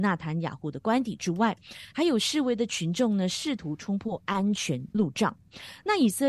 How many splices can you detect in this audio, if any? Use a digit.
0